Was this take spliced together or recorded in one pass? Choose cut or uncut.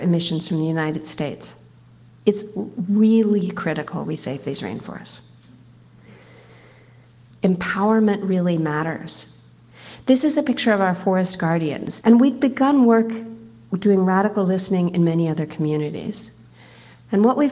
cut